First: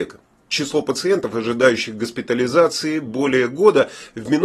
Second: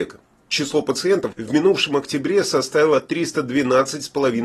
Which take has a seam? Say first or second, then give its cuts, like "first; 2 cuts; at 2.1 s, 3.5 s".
second; 1 cut; at 1.3 s